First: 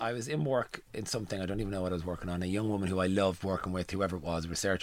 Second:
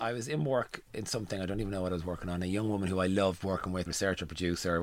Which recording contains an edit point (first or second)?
second